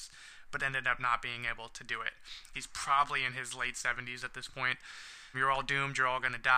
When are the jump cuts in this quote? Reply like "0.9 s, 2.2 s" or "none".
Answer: 2.5 s, 5.3 s